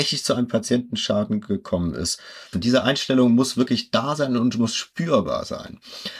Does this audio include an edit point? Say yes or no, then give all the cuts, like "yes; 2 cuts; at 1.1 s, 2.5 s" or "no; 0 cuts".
yes; 1 cut; at 2.5 s